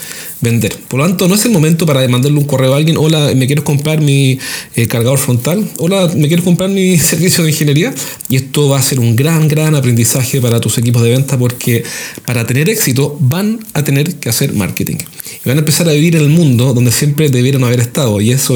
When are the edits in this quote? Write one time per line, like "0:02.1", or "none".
0:08.2